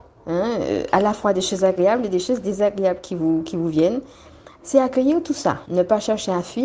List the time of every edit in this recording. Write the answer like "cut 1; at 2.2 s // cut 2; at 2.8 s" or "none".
none